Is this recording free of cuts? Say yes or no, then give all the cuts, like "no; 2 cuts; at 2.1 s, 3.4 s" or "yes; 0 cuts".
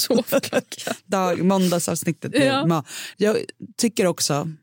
no; 1 cut; at 3.1 s